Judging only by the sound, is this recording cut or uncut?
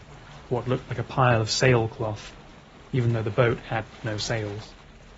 uncut